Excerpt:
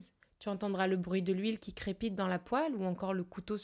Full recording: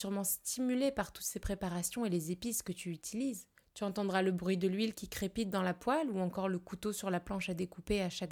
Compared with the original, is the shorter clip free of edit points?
yes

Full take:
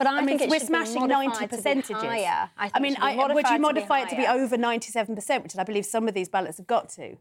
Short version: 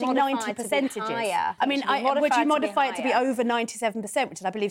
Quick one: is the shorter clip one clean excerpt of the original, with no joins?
no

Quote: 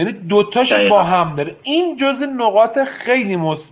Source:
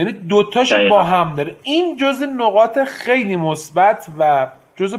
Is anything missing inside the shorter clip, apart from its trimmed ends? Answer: no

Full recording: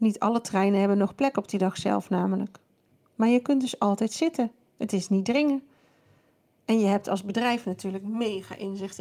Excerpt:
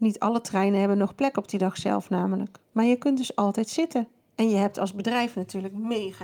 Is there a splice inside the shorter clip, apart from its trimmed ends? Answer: yes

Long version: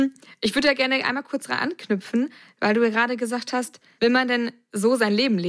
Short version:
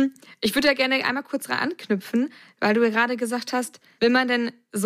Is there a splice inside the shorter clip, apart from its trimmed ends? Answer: no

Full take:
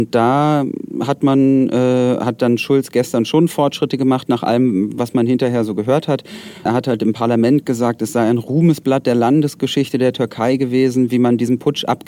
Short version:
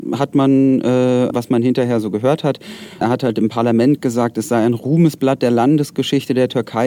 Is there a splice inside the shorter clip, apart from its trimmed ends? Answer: yes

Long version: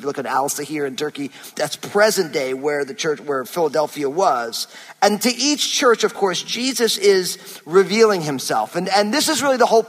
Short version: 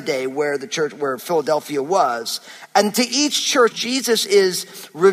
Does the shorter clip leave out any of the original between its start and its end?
yes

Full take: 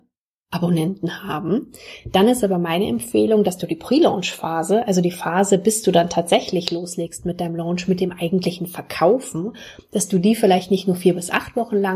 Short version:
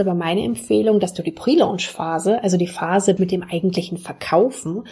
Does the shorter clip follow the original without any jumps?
no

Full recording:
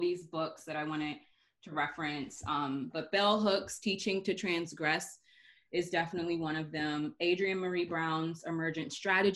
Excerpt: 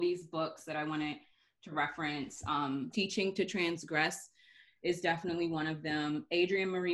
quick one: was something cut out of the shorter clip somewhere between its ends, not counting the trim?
yes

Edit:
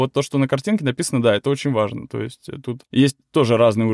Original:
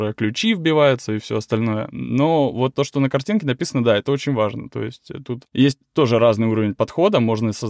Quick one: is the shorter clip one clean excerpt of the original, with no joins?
yes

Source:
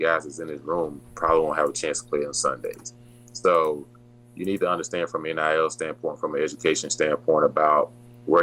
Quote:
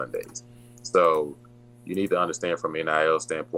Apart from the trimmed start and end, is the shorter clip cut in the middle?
no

